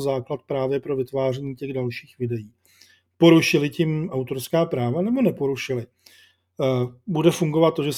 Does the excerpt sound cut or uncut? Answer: uncut